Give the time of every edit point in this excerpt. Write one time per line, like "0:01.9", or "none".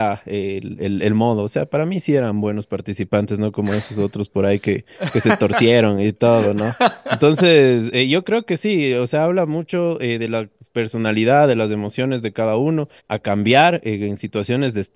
0:13.0